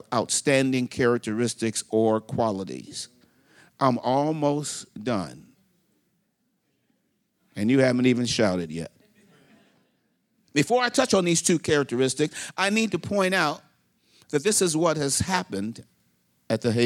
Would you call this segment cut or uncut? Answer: uncut